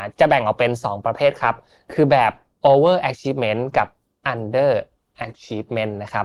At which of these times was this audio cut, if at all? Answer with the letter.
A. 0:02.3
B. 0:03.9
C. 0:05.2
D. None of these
D